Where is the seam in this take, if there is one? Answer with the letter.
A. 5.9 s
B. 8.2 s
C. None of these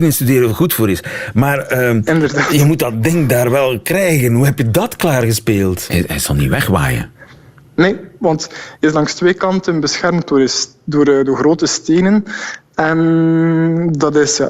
A